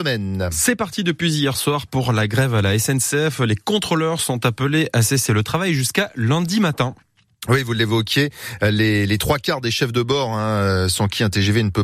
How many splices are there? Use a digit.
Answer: 0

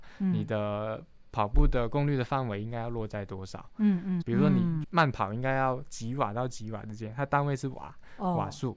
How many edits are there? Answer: 1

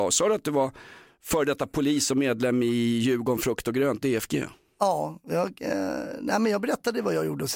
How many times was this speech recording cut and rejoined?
0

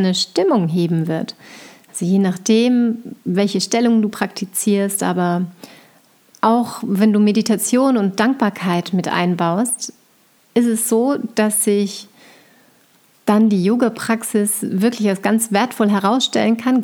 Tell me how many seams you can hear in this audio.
0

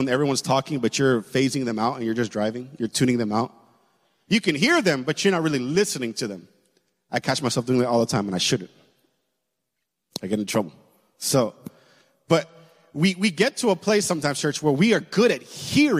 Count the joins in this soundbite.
0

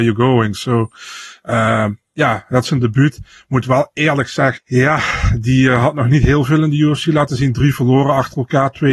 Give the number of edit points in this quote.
1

